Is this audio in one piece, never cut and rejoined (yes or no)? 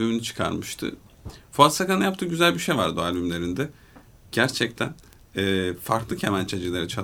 yes